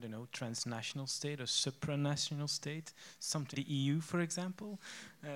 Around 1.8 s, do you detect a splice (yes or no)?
no